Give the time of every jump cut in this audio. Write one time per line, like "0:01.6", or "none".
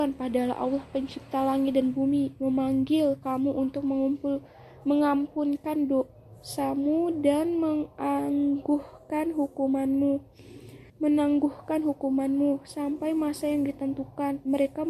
0:10.9

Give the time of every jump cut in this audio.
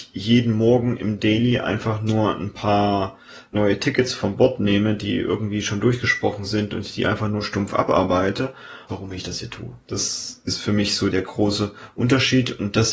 0:08.9

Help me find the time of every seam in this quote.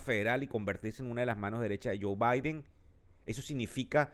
none

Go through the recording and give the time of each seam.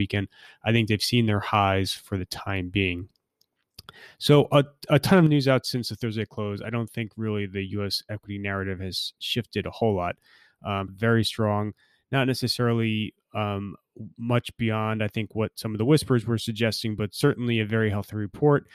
0:10.9

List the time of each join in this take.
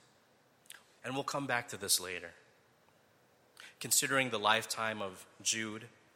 0:01.0

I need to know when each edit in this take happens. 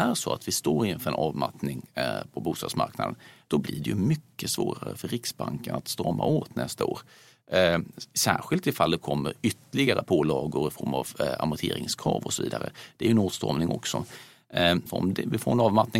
0:14.9

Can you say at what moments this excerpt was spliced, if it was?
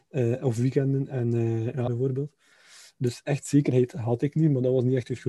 0:01.9

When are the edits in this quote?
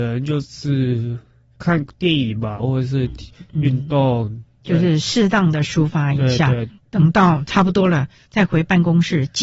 0:02.6

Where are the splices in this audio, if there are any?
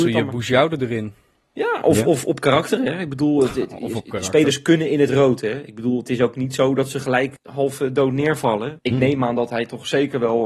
0:07.4
0:08.8

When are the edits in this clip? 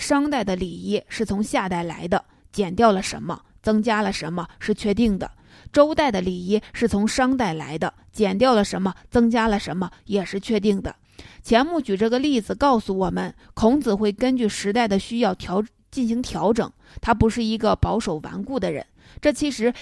0:11.0

